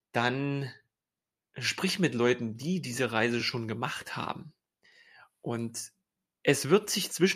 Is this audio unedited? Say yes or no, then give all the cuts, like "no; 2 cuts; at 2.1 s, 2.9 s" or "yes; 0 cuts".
yes; 0 cuts